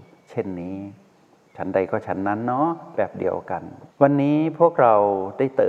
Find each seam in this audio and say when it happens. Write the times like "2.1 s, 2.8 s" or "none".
3.9 s